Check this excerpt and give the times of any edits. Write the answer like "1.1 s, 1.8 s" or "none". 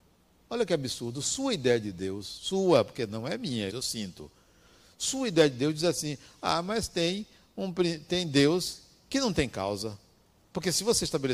3.7 s

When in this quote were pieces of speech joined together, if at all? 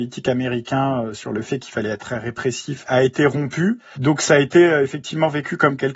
3.9 s

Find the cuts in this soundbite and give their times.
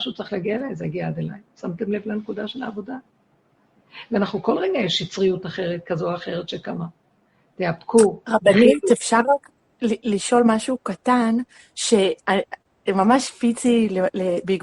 1.5 s

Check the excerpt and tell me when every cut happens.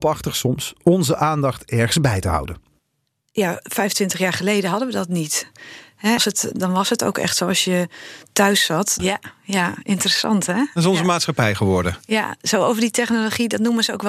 6.2 s, 9.0 s

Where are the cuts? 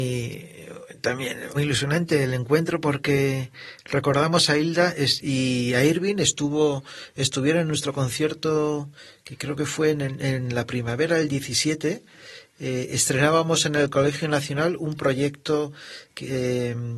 1.5 s

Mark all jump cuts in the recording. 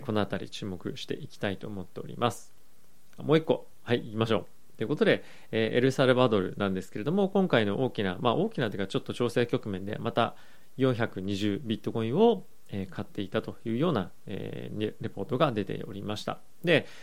3.2 s

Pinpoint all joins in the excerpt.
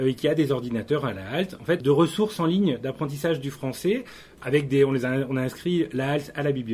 1.8 s, 4.4 s

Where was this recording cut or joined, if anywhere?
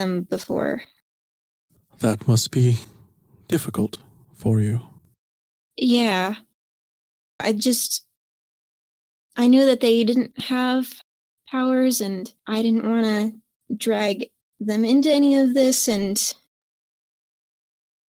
7.4 s, 12.4 s

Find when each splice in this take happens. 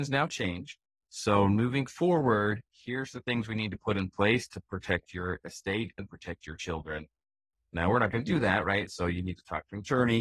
none

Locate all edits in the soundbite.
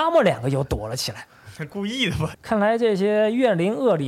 2.3 s

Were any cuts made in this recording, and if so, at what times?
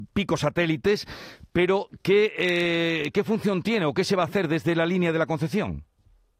none

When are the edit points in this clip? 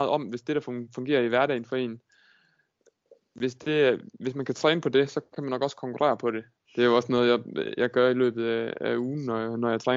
6.6 s

